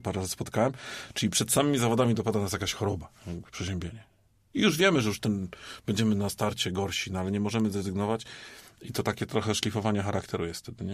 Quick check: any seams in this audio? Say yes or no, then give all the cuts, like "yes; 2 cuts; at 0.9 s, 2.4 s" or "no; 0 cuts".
no; 0 cuts